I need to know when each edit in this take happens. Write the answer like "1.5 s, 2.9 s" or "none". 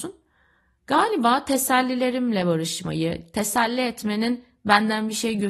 none